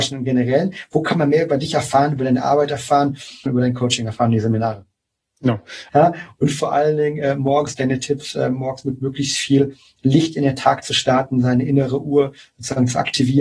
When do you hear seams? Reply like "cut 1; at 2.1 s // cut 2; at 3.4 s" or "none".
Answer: cut 1; at 3.5 s // cut 2; at 5.9 s

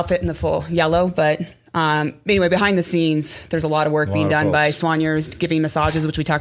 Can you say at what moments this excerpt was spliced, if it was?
none

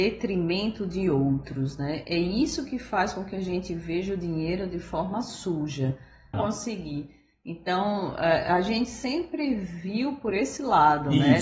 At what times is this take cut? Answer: cut 1; at 6.3 s

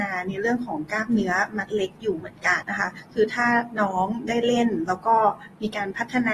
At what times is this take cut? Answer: cut 1; at 2.6 s

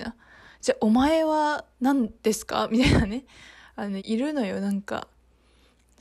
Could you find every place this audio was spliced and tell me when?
cut 1; at 4.0 s

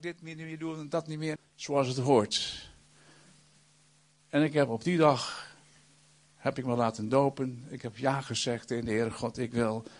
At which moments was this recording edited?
cut 1; at 1.4 s

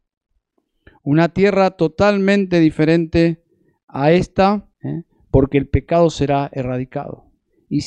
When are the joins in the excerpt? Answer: cut 1; at 4.7 s

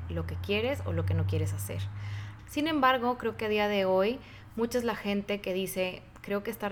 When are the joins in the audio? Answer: cut 1; at 2.4 s

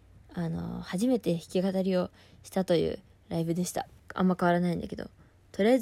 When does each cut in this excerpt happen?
cut 1; at 4.0 s

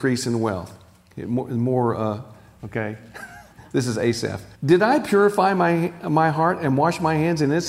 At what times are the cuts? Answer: cut 1; at 2.6 s // cut 2; at 4.5 s

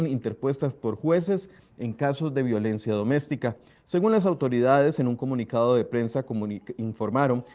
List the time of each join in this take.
cut 1; at 3.8 s

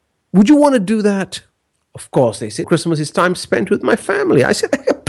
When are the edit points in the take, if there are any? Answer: cut 1; at 2.6 s

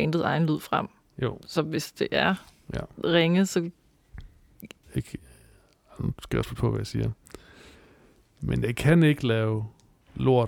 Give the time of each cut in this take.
cut 1; at 4.8 s

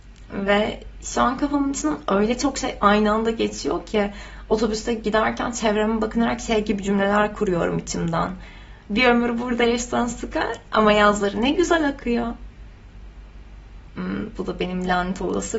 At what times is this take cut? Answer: cut 1; at 8.9 s // cut 2; at 13.9 s

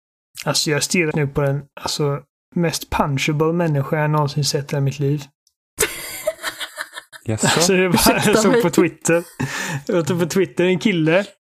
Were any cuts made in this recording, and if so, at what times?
cut 1; at 1.1 s

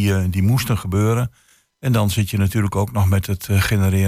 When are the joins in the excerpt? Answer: none

